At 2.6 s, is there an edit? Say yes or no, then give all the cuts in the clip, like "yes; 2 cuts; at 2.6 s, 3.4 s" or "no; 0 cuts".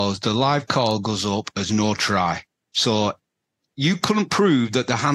yes; 1 cut; at 2.6 s